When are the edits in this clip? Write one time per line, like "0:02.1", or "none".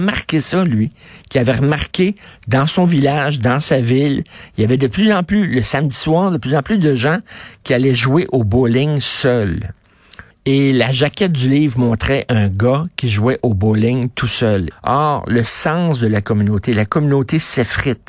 0:10.3
0:14.7